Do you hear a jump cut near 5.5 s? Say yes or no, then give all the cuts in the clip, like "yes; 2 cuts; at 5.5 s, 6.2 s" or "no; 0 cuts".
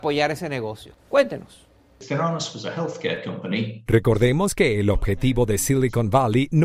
no; 2 cuts; at 1.0 s, 3.9 s